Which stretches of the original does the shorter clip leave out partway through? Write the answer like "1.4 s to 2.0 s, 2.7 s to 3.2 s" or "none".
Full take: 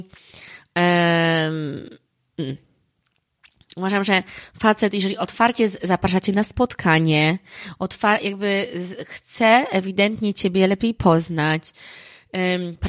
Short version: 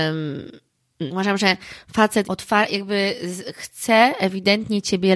2.5 s to 3.7 s, 4.9 s to 7.8 s